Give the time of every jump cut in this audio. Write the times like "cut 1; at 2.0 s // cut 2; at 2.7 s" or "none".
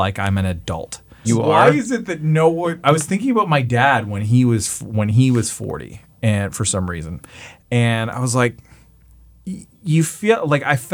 cut 1; at 1.2 s